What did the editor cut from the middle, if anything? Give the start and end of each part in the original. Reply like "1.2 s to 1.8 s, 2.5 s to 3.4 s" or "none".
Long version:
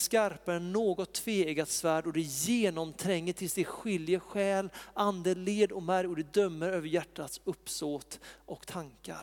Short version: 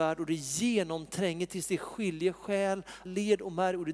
4.9 s to 5.4 s